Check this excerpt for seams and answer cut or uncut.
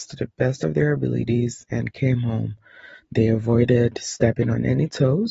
uncut